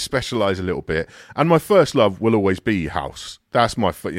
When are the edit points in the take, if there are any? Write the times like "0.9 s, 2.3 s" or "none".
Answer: none